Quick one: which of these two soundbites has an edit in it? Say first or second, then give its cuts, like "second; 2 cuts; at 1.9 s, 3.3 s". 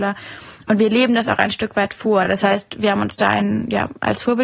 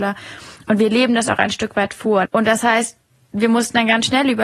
second; 1 cut; at 2.3 s